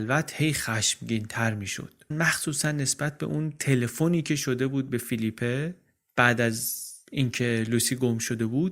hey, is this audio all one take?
no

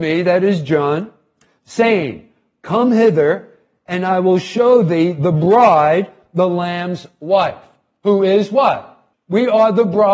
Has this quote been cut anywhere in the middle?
yes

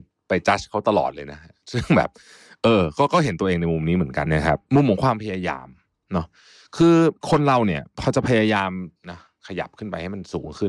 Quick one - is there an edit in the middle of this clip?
yes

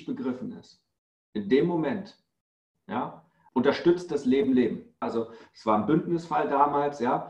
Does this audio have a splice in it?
yes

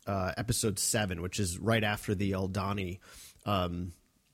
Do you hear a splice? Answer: no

